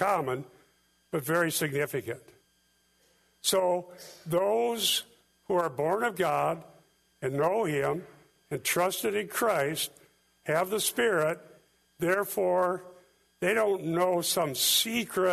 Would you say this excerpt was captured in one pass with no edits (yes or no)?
yes